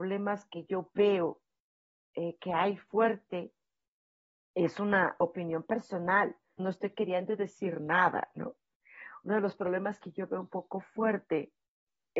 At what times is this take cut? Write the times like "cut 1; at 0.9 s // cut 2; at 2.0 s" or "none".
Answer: cut 1; at 6.6 s